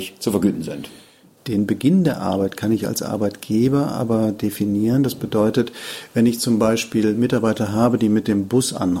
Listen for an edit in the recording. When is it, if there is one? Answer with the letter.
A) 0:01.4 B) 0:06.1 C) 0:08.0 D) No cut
D